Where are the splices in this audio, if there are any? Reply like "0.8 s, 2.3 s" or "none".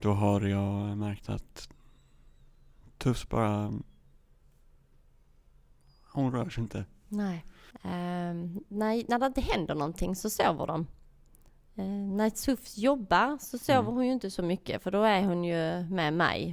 7.7 s